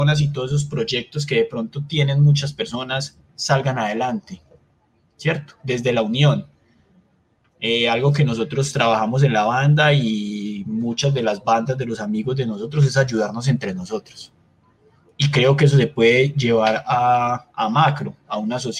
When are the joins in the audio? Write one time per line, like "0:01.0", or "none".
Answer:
none